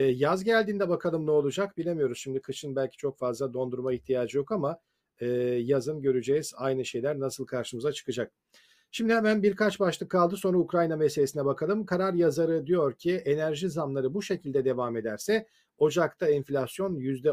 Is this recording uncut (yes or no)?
yes